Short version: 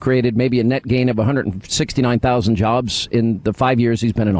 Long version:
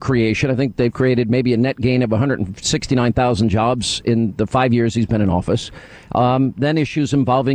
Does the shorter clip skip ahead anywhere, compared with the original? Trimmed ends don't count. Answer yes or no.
no